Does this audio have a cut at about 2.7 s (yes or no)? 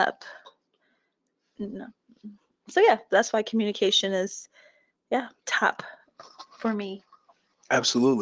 yes